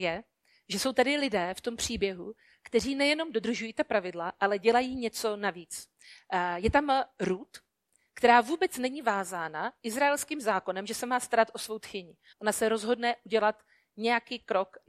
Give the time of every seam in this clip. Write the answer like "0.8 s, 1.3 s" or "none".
12.3 s

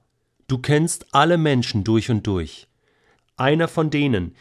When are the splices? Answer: 3.2 s

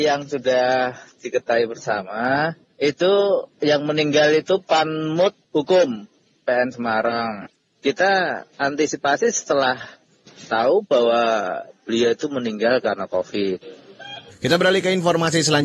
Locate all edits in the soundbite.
8.5 s, 14.3 s

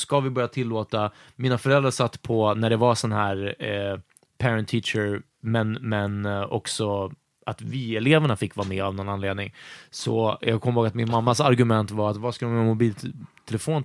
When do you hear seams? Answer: none

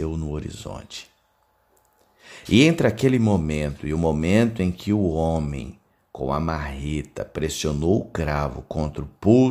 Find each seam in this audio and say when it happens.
none

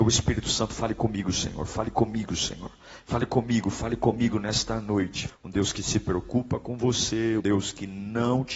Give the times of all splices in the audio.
5.3 s, 7.4 s

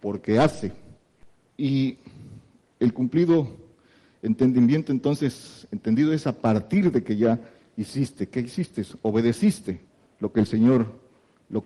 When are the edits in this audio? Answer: none

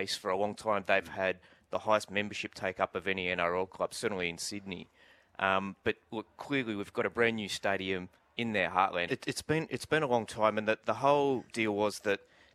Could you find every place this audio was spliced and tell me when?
9.1 s

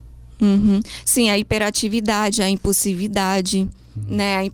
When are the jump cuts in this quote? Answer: none

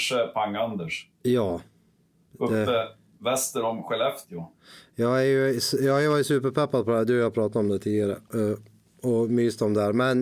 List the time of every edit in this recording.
none

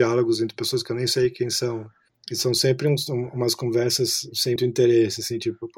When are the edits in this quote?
4.6 s

